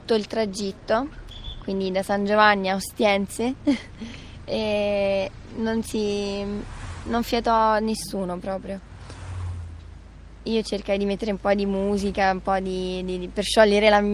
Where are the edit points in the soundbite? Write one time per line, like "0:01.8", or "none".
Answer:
none